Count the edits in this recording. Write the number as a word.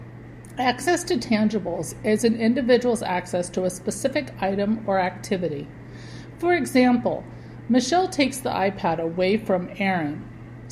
zero